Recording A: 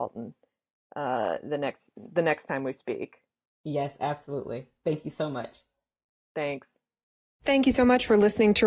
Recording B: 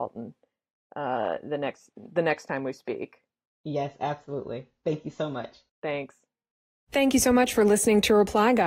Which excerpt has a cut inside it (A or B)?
B